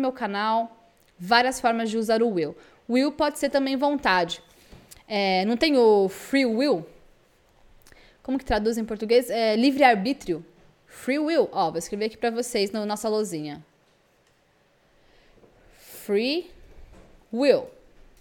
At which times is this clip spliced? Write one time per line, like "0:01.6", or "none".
none